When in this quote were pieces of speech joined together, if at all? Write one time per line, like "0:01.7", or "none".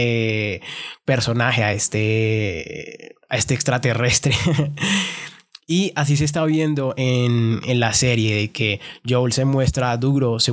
none